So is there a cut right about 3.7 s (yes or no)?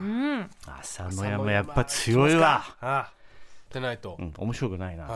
yes